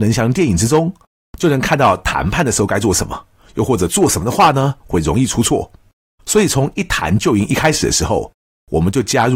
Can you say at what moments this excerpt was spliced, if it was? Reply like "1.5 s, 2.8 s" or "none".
6.2 s